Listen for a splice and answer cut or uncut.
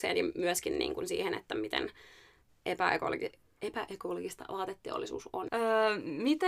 cut